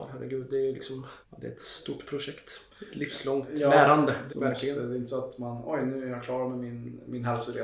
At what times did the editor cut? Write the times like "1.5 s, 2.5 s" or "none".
1.2 s, 4.3 s